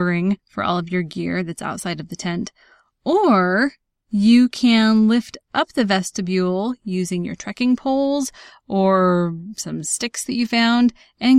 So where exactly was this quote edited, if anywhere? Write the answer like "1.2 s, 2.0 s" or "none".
none